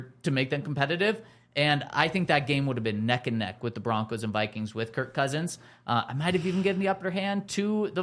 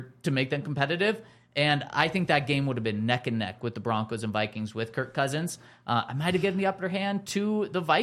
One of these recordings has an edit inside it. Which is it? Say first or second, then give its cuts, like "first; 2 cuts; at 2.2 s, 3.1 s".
second; 1 cut; at 6.4 s